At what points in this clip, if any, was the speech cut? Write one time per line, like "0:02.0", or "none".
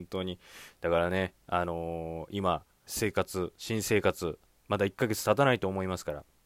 0:02.9
0:04.6